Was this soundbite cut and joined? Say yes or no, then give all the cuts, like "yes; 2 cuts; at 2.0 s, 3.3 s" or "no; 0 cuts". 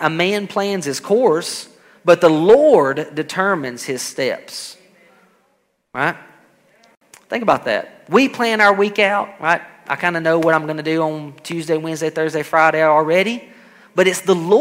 no; 0 cuts